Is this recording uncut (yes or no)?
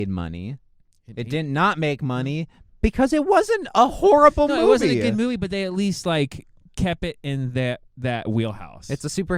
yes